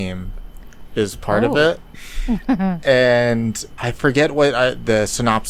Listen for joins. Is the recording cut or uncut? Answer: cut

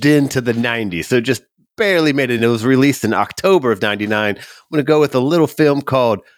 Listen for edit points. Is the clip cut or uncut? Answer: uncut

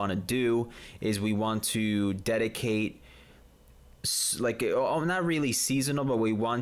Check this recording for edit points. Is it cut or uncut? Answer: uncut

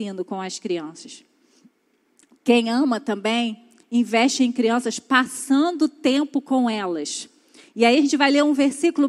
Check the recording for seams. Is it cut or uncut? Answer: uncut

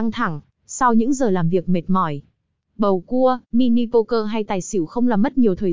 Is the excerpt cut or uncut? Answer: cut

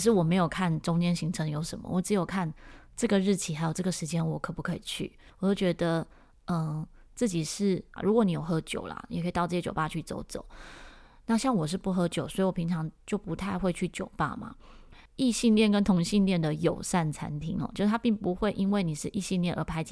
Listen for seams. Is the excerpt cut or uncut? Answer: cut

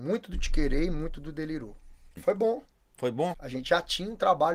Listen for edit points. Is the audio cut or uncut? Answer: cut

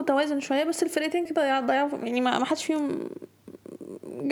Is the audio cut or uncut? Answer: cut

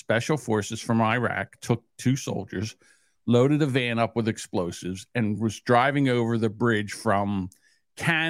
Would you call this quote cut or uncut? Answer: uncut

